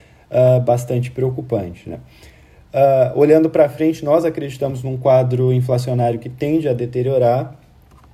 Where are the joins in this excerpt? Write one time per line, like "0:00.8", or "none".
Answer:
none